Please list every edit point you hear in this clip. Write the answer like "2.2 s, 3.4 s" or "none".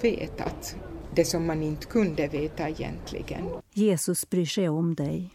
3.6 s